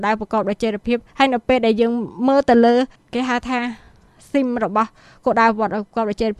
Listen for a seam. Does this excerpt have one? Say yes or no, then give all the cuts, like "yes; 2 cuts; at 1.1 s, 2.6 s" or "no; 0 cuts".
no; 0 cuts